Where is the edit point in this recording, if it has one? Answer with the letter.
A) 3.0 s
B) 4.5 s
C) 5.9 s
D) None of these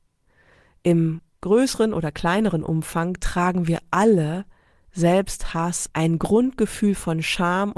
C